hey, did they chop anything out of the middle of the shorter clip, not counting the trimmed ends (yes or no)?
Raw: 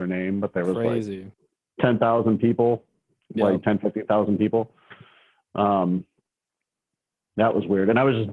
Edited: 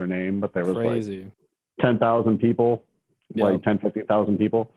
no